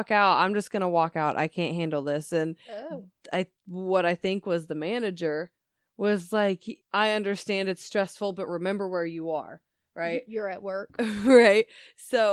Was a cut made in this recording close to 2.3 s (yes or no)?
no